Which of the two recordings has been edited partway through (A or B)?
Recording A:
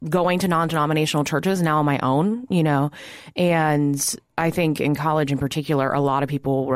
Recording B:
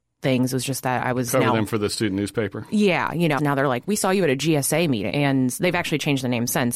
B